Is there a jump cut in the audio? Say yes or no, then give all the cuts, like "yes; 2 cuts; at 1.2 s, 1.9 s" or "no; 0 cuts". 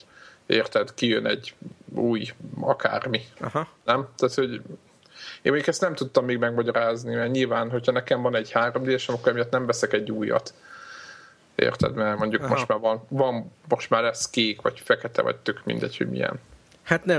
no; 0 cuts